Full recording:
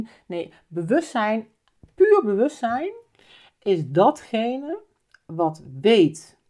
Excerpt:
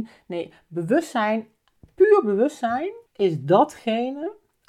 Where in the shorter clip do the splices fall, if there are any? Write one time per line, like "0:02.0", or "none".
0:03.1